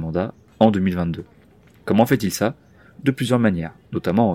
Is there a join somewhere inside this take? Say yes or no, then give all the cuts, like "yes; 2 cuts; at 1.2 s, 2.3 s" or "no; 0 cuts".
no; 0 cuts